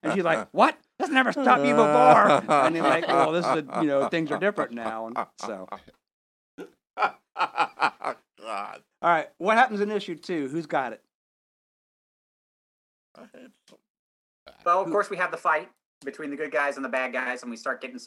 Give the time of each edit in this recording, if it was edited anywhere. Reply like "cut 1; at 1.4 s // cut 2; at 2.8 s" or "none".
none